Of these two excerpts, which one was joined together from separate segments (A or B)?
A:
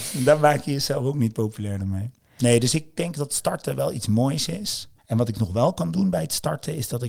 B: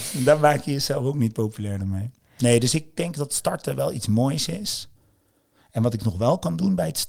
A